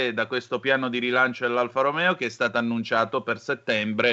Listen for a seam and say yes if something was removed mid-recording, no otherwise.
no